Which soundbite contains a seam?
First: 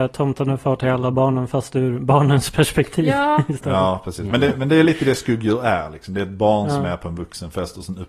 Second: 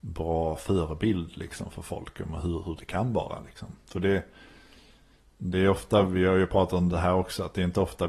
first; 1 cut; at 4.3 s

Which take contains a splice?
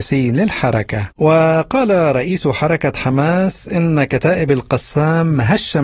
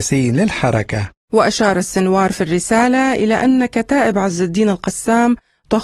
first; 1 cut; at 1.1 s

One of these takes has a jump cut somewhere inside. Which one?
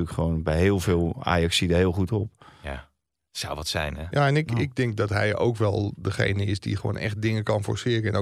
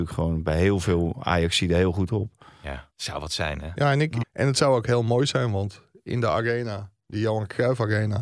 second; 2 cuts; at 2.9 s, 4.2 s

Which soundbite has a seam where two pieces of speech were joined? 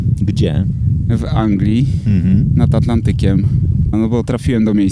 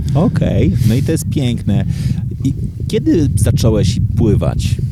first; 1 cut; at 3.9 s

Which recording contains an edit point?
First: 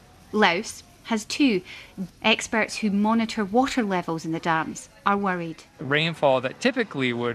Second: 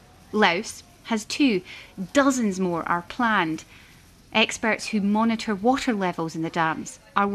first; 1 cut; at 2.1 s

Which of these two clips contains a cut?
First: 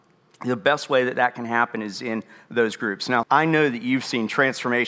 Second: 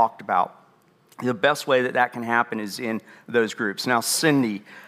first; 1 cut; at 3.2 s

